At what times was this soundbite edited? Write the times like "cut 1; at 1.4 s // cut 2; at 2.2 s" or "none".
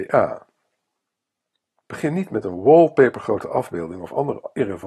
cut 1; at 1.8 s